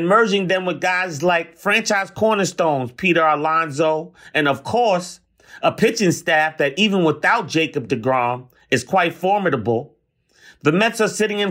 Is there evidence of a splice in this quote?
no; 0 cuts

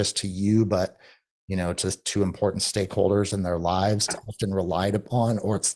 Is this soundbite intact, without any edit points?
no; 1 cut; at 4.1 s

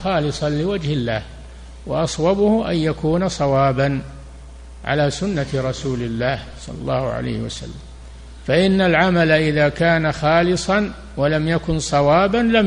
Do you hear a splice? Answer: no; 0 cuts

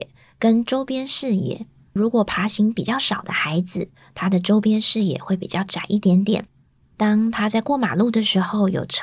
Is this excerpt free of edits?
yes; 0 cuts

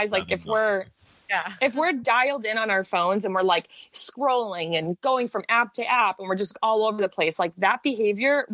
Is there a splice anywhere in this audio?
no; 0 cuts

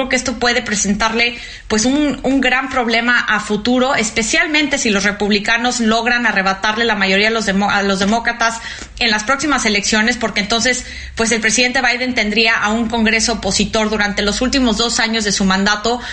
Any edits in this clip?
no; 0 cuts

